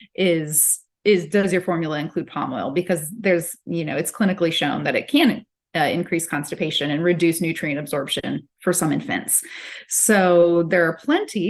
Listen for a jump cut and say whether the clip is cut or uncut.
cut